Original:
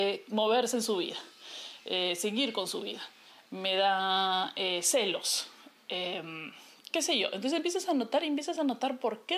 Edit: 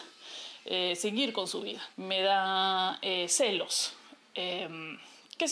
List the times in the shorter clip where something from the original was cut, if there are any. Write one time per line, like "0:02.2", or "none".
0:01.9